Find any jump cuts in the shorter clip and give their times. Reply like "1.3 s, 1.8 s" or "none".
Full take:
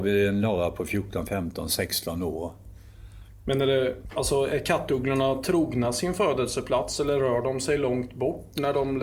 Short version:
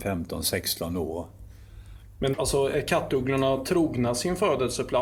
2.3 s